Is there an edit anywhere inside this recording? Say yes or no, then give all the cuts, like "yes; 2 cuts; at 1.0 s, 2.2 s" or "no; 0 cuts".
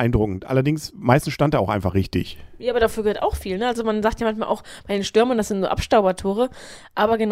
no; 0 cuts